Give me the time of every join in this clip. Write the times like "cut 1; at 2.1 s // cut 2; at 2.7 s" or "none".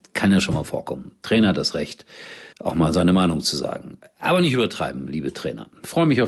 cut 1; at 2.5 s